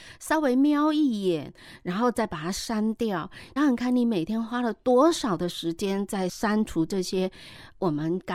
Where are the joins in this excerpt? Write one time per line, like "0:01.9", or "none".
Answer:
0:03.6